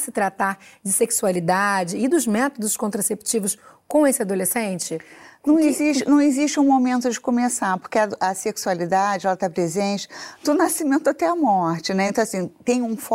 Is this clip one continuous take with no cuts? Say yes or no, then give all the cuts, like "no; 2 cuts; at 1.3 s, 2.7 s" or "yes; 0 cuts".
yes; 0 cuts